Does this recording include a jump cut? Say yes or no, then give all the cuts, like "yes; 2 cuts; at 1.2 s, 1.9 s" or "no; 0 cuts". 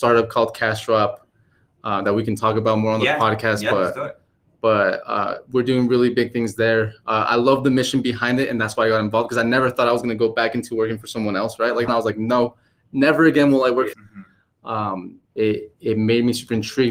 yes; 3 cuts; at 11.9 s, 13.9 s, 15.3 s